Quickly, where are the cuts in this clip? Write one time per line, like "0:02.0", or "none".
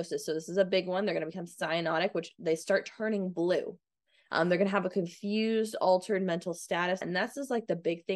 0:04.3
0:07.0